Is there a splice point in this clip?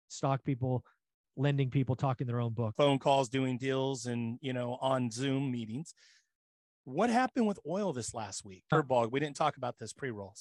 yes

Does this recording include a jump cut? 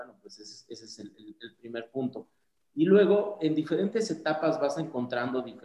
no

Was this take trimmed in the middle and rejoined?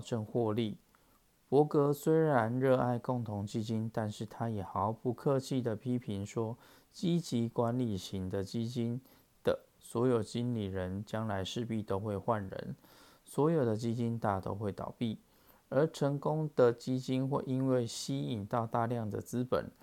no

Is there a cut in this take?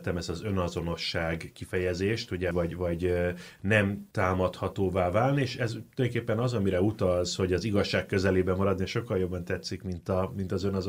yes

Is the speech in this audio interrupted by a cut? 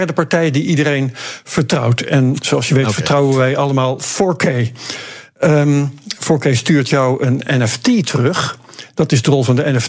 no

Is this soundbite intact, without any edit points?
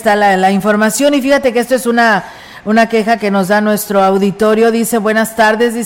yes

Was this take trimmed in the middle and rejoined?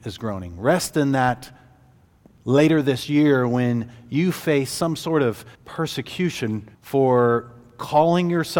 yes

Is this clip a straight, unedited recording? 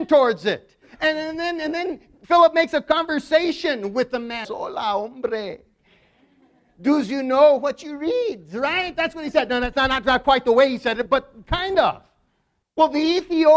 no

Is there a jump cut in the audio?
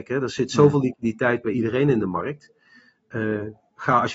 no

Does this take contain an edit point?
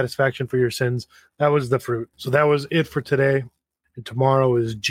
yes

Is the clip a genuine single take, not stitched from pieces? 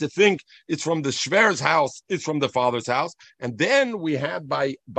yes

